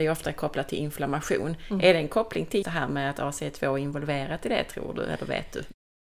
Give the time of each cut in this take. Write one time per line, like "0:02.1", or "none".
0:02.6